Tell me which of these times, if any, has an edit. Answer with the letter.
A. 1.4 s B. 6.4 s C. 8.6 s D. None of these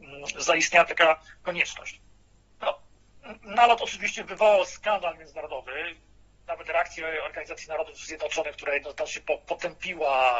A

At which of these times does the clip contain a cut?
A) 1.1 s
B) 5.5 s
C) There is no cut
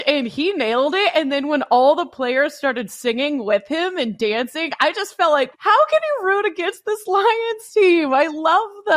B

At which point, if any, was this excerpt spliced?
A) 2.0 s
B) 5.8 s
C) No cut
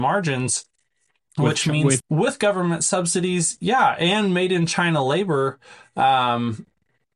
A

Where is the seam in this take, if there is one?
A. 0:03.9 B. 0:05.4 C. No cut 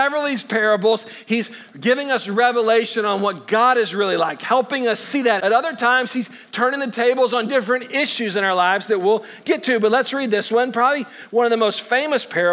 B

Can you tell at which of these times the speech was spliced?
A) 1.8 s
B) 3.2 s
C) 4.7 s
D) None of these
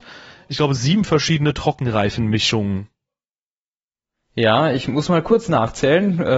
D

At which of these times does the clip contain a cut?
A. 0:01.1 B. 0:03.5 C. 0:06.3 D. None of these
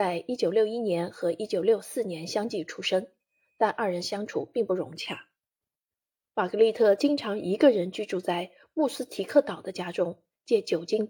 D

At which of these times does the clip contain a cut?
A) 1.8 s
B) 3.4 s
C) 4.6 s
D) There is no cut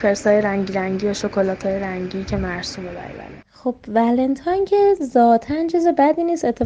B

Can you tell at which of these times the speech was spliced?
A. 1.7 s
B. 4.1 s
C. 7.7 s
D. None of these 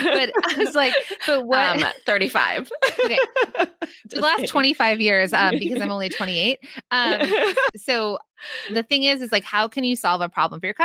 C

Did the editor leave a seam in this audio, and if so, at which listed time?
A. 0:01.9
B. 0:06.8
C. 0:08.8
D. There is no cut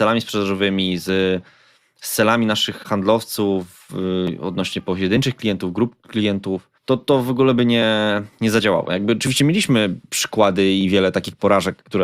B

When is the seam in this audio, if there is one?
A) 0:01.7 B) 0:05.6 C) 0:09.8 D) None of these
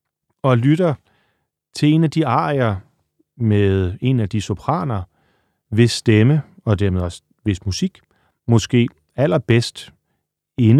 D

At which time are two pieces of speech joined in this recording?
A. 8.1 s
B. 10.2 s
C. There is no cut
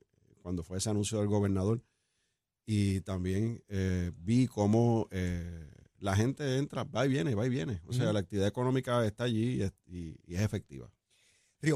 B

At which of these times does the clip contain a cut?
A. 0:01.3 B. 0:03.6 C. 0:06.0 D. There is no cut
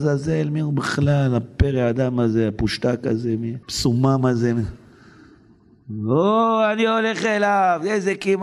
B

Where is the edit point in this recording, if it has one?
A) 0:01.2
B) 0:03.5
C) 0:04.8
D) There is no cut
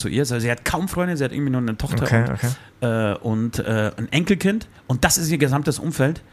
C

